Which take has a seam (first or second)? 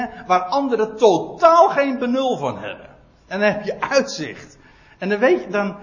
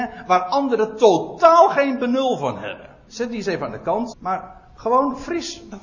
second